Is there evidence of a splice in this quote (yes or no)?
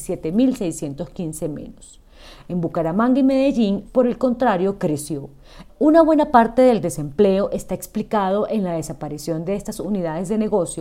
yes